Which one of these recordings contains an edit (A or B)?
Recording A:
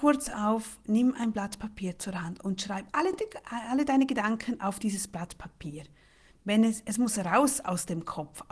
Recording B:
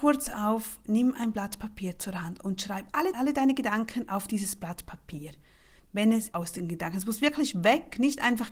B